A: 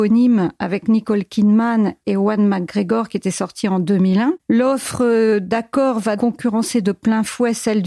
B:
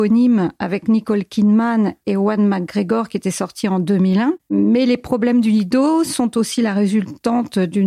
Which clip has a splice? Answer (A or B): A